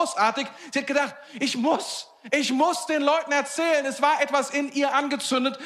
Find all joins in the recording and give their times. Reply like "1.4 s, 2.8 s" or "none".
none